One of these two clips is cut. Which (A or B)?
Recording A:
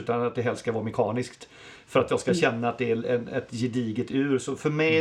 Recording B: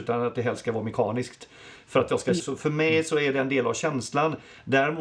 B